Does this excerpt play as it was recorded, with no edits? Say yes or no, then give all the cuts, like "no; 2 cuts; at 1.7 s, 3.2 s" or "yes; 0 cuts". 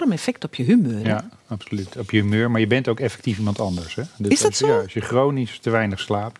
yes; 0 cuts